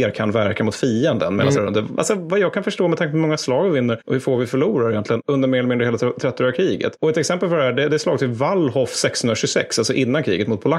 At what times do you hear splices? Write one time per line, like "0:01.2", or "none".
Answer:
0:01.5